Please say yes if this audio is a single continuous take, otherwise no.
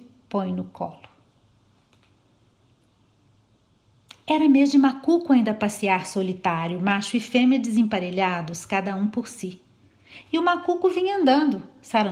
yes